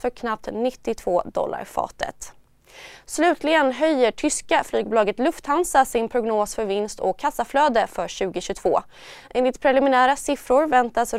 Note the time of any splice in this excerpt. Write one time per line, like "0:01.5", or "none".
none